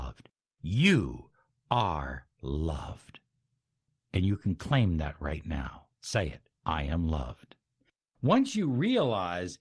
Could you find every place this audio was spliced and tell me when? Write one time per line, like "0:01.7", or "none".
0:06.6